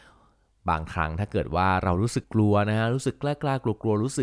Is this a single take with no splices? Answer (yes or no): no